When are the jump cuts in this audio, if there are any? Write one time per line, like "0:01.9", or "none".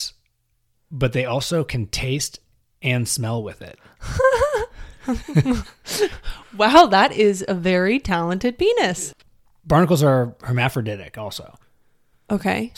none